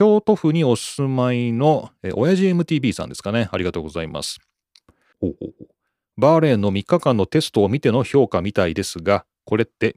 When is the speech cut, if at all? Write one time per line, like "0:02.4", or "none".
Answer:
0:05.1